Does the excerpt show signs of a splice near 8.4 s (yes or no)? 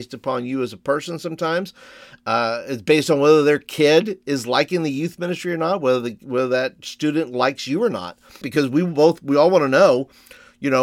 yes